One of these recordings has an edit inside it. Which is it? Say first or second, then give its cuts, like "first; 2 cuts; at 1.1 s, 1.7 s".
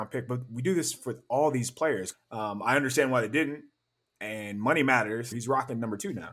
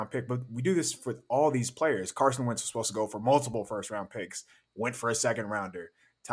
first; 2 cuts; at 2.1 s, 5.3 s